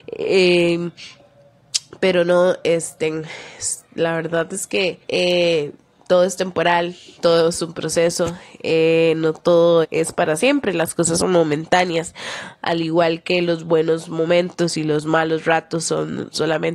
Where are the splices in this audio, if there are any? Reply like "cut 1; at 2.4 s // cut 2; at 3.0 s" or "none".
cut 1; at 5.0 s // cut 2; at 9.8 s

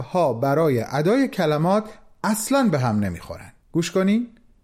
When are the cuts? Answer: cut 1; at 3.6 s

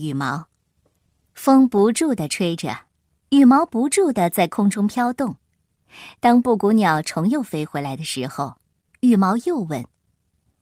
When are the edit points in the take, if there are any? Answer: none

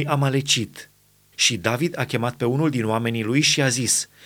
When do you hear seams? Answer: cut 1; at 1.3 s

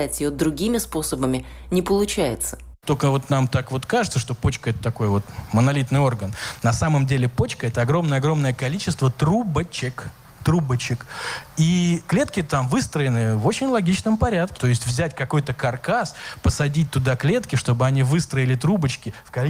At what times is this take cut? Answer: cut 1; at 14.6 s

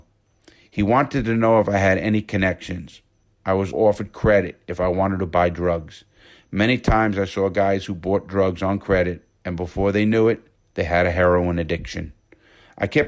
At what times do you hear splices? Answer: cut 1; at 3.7 s

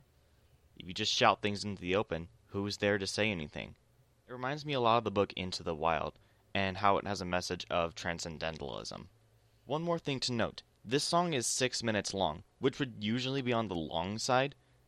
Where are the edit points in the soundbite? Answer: cut 1; at 2.4 s

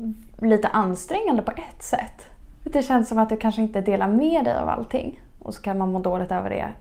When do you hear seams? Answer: cut 1; at 2.5 s // cut 2; at 5.4 s

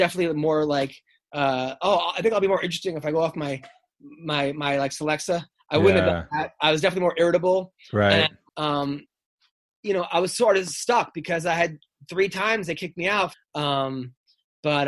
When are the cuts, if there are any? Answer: cut 1; at 8.5 s // cut 2; at 13.3 s

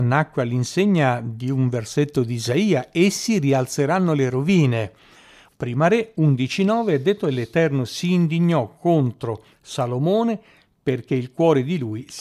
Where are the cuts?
cut 1; at 5.5 s

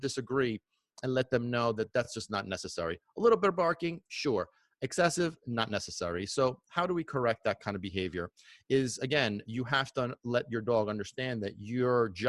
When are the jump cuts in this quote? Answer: none

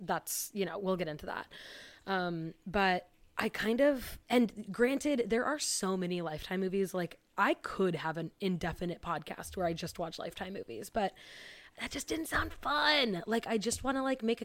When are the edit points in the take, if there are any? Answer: cut 1; at 4.2 s

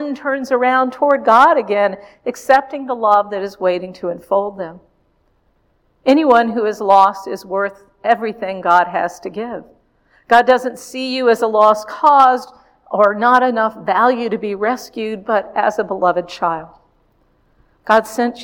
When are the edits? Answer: none

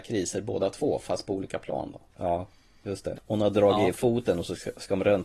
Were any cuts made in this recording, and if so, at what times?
cut 1; at 2.1 s // cut 2; at 3.1 s

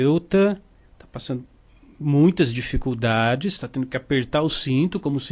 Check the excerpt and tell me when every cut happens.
none

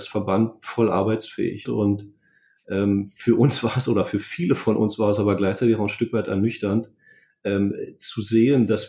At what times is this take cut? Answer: cut 1; at 1.6 s

